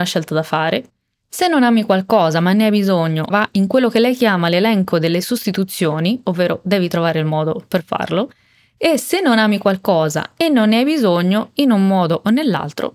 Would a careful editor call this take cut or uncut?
cut